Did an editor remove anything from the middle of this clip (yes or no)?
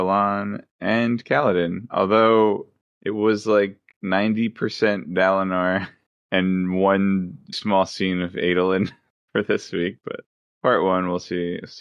yes